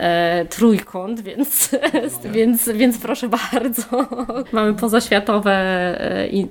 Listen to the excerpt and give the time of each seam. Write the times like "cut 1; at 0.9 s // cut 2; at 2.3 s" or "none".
none